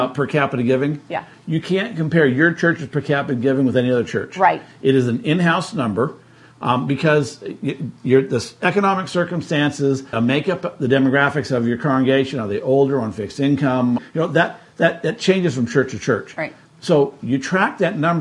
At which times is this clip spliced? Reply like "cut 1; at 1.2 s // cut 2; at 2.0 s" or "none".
cut 1; at 10.1 s // cut 2; at 14.0 s